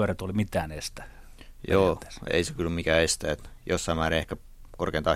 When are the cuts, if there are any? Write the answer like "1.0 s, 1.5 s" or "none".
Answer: 2.3 s

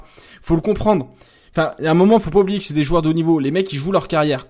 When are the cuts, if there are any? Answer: none

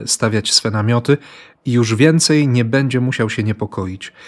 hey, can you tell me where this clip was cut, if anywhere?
none

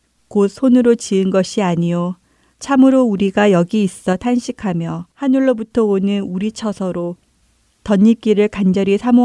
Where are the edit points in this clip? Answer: 2.5 s, 5.1 s

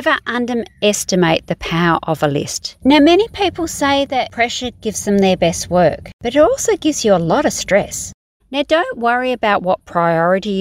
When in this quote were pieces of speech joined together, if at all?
2.8 s, 8.4 s

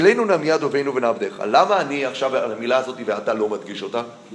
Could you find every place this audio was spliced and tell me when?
none

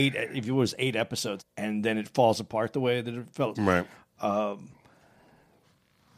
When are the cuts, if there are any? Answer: 1.4 s, 3.5 s

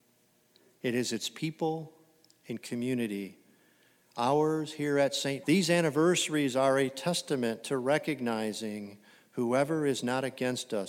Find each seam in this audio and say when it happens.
5.4 s

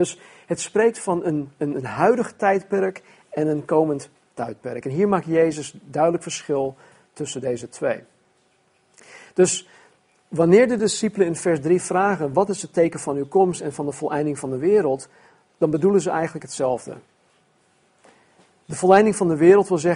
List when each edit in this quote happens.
none

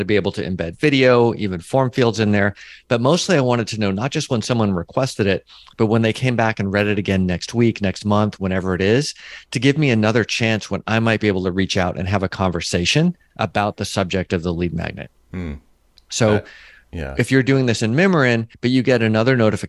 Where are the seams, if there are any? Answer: 18.5 s

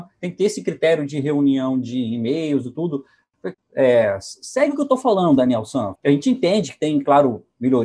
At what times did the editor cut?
3.5 s, 5.9 s

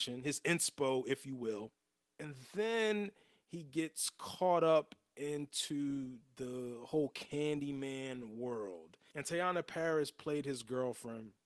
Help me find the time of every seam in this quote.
none

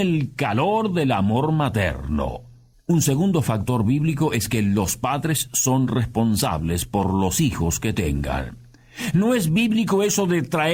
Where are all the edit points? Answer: 2.7 s

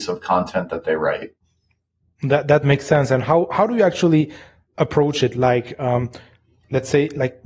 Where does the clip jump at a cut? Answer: none

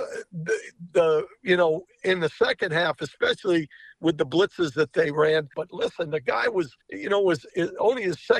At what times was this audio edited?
5.5 s, 6.8 s

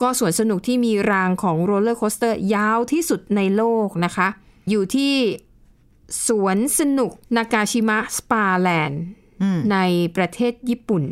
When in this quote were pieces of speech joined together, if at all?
4.7 s, 7.2 s

